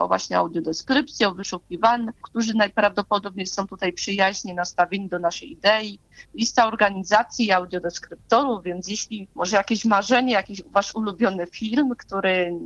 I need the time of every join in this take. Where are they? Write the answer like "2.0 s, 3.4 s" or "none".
2.2 s, 9.3 s